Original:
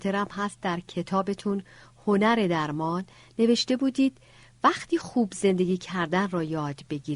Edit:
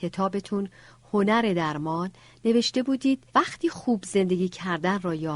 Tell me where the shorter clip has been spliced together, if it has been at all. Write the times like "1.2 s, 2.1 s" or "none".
3.3 s